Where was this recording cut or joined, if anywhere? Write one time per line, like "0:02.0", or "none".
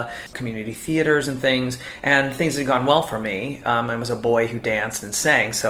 none